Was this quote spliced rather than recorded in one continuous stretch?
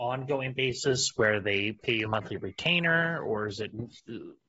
yes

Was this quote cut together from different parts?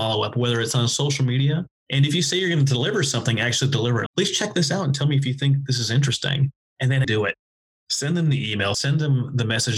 yes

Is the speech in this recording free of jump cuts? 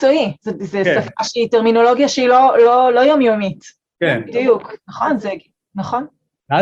no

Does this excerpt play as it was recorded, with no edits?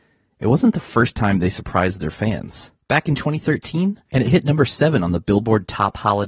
no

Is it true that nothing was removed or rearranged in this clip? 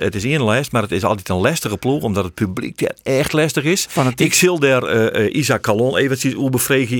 yes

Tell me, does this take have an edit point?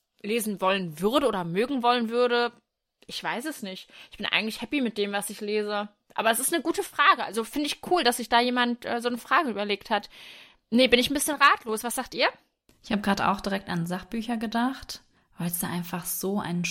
no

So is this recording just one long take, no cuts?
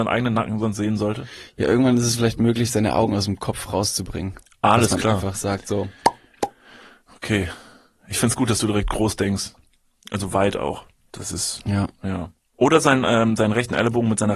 yes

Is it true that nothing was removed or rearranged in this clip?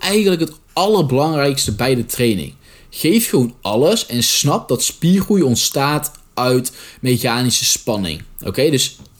yes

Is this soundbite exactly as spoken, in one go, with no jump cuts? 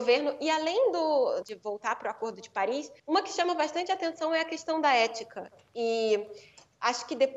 no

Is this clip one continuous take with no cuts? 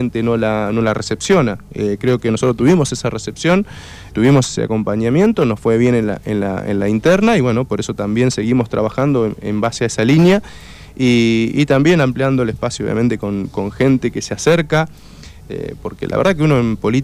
no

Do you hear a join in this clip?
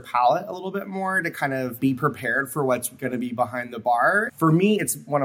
yes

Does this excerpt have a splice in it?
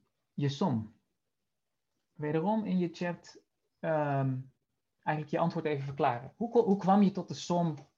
no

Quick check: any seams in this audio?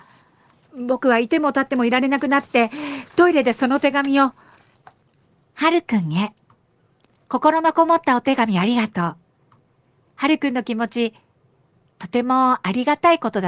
no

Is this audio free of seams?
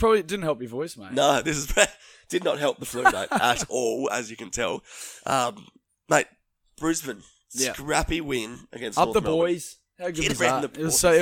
yes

